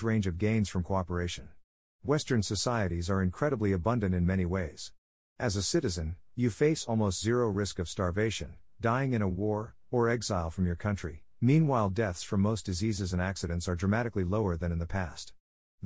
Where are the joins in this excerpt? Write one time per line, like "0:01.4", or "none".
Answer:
none